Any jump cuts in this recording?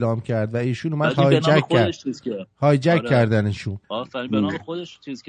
yes; 1 cut; at 3.8 s

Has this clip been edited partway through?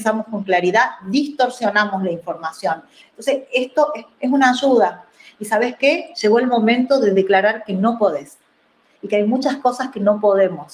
yes; 2 cuts; at 3.0 s, 4.2 s

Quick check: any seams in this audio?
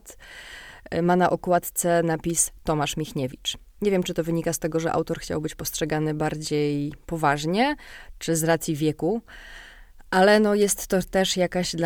no; 0 cuts

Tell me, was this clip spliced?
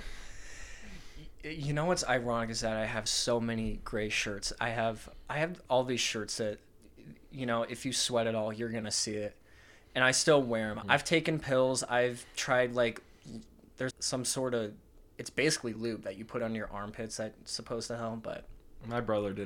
yes; 3 cuts; at 3.1 s, 10.8 s, 13.9 s

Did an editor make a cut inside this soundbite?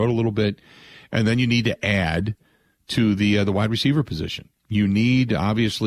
yes; 1 cut; at 4.6 s

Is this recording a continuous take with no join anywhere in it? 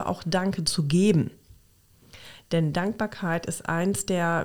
yes; 0 cuts

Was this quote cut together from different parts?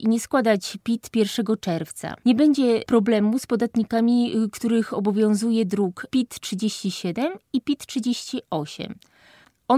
no; 0 cuts

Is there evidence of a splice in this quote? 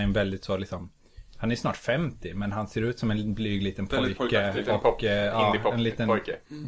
no; 0 cuts

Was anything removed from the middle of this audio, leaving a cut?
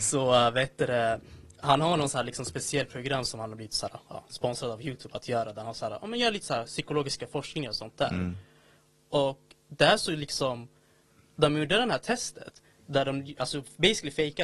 no; 0 cuts

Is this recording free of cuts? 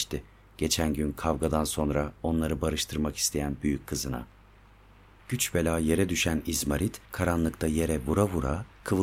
no; 1 cut; at 5.2 s

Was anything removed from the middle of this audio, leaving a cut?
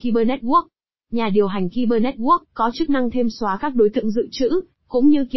yes; 1 cut; at 2.4 s

